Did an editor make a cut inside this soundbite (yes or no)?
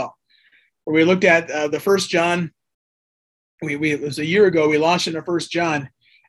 no